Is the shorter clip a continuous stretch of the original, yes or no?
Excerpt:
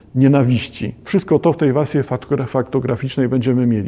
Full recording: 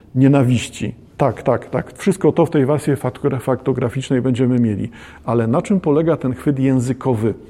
no